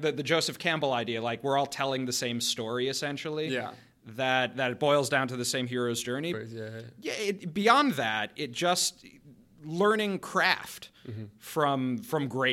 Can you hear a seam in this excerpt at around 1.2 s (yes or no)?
no